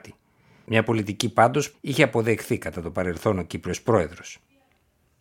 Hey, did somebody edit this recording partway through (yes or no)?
yes